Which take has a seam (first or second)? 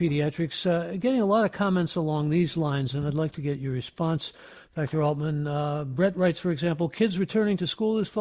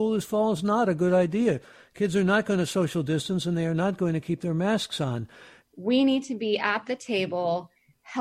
second